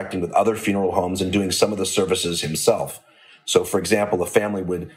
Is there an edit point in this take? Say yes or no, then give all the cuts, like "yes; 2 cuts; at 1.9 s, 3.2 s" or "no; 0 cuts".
no; 0 cuts